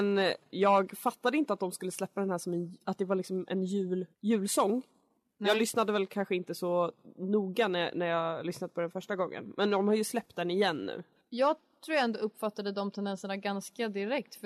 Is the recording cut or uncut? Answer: cut